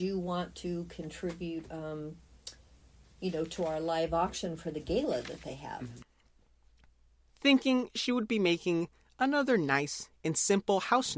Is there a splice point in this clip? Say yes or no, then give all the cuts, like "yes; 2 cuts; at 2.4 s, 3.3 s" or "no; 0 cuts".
no; 0 cuts